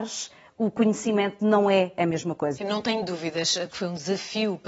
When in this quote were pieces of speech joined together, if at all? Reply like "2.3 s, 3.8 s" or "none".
2.6 s, 3.7 s